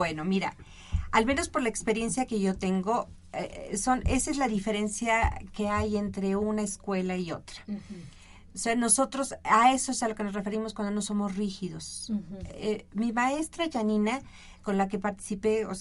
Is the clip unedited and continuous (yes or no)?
yes